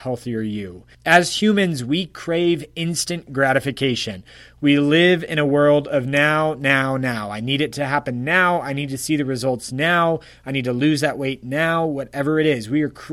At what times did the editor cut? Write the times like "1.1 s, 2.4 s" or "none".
0.9 s